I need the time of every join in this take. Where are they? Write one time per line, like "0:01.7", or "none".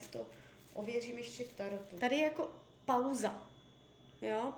0:02.0